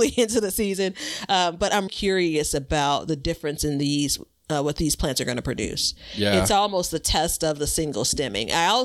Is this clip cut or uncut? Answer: cut